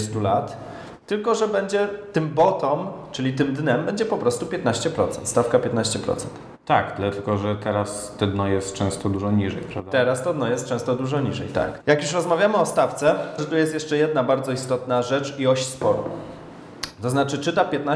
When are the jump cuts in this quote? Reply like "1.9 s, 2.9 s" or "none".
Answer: 11.8 s, 13.4 s